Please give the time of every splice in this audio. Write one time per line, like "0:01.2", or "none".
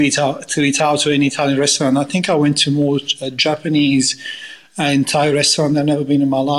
none